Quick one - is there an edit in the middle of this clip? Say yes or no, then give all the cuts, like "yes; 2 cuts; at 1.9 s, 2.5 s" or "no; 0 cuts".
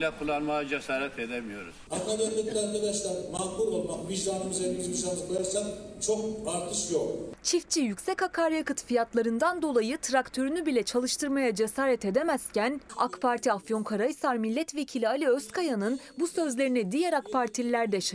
no; 0 cuts